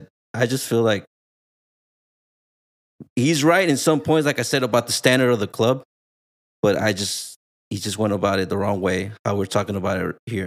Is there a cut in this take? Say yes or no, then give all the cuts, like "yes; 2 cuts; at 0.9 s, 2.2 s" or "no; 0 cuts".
no; 0 cuts